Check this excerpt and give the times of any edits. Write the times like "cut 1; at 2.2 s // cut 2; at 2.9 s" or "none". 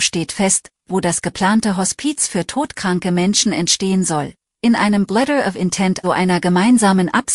cut 1; at 6.0 s